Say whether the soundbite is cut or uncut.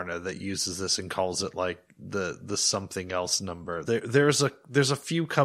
cut